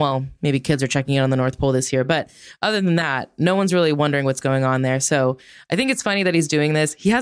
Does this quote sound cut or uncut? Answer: uncut